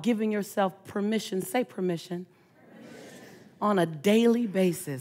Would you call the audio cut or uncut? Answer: uncut